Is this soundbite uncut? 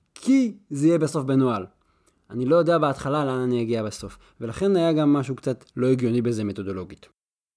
yes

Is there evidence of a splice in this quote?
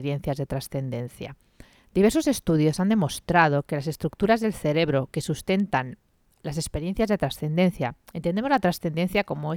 no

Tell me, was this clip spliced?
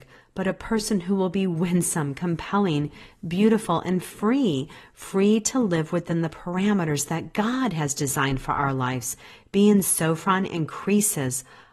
no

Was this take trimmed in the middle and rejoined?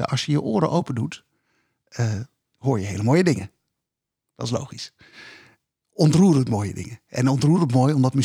no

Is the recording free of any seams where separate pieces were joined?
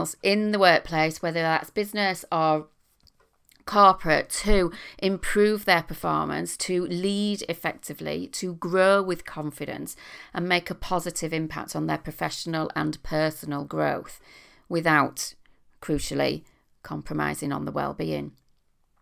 yes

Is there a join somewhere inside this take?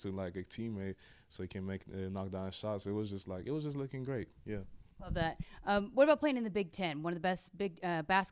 no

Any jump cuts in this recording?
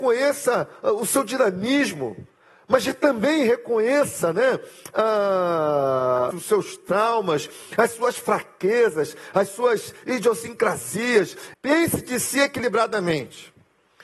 yes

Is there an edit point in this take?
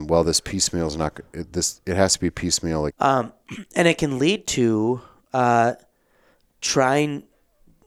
yes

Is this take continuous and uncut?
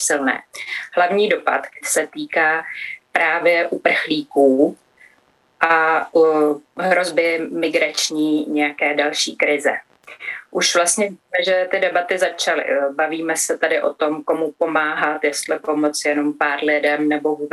no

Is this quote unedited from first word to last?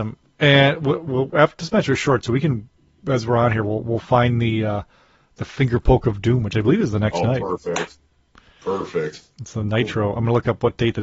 yes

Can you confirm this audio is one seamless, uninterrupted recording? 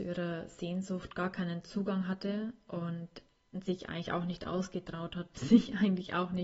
no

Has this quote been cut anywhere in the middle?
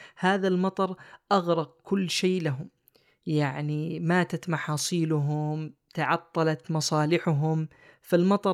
no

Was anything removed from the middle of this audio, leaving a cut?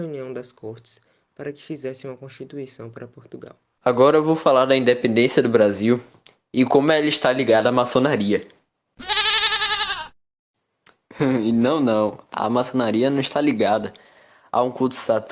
yes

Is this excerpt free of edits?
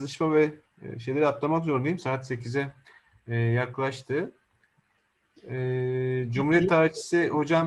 yes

